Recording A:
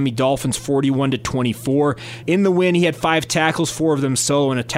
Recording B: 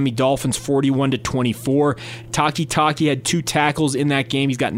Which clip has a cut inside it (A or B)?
A